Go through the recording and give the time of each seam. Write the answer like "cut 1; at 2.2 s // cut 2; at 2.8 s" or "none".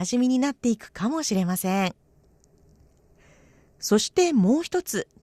none